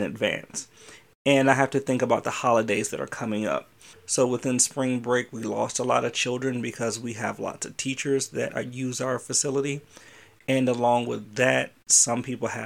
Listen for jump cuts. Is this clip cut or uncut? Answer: cut